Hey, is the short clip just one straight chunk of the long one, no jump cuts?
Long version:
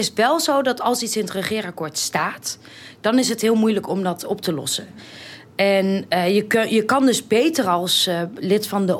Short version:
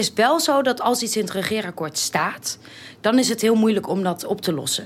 yes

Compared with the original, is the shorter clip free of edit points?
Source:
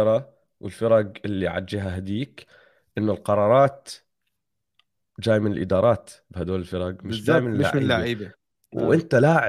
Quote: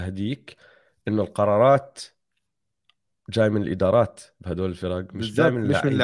yes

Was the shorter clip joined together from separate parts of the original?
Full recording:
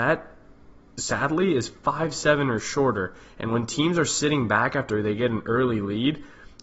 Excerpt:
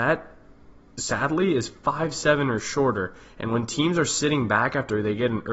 no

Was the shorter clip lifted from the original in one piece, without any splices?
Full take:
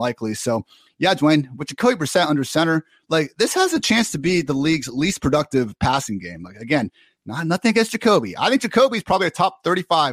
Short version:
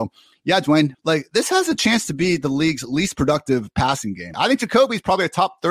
no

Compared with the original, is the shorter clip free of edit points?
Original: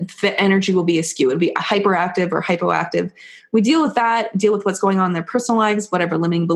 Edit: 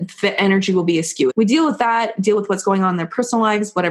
no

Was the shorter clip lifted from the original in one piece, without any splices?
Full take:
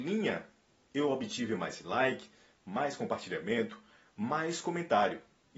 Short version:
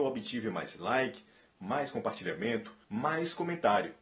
no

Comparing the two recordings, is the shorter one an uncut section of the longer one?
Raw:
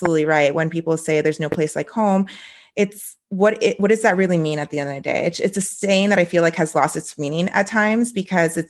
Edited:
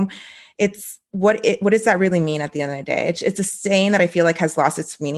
yes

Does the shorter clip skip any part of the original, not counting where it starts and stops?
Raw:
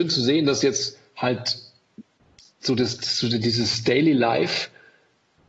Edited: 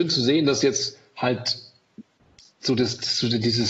no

